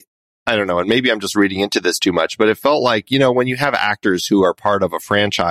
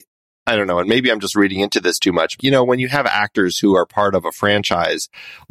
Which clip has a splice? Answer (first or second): second